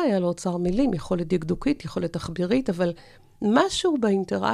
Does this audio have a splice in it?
no; 0 cuts

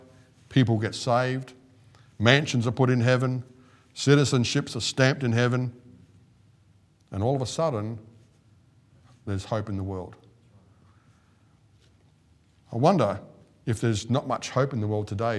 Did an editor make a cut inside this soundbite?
no; 0 cuts

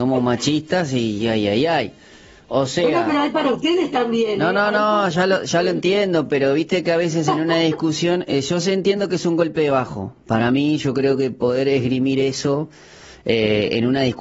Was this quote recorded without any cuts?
yes; 0 cuts

